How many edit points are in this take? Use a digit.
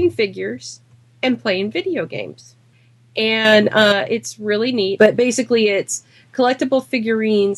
1